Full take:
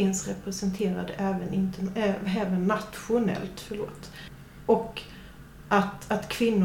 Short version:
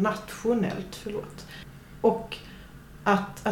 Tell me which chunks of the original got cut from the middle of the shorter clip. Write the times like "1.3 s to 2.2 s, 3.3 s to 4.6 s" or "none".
none